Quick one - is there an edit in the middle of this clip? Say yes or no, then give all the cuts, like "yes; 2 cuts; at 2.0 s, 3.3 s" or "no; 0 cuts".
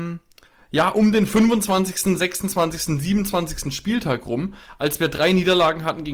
no; 0 cuts